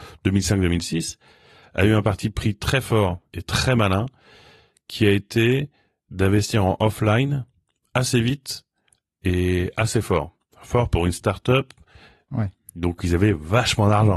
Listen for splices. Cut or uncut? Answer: cut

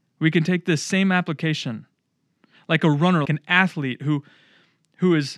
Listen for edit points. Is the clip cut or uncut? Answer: cut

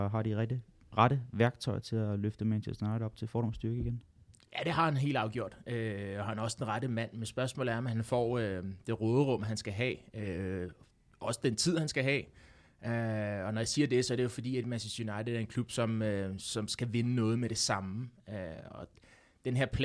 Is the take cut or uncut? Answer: uncut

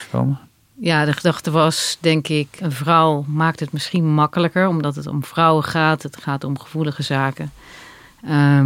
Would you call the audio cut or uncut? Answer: uncut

